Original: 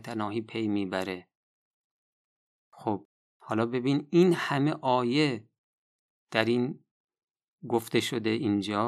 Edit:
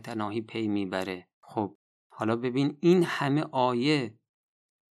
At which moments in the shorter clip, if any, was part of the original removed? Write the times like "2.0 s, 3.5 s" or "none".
1.3 s